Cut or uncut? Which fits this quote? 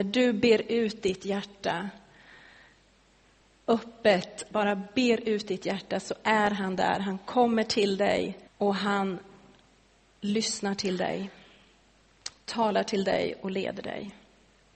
cut